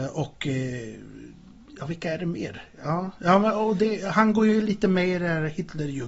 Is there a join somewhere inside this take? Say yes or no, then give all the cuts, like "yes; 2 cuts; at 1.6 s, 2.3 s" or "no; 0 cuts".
no; 0 cuts